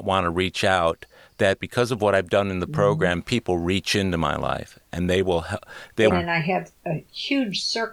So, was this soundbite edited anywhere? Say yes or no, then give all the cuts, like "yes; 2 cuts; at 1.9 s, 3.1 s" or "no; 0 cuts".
yes; 1 cut; at 6.1 s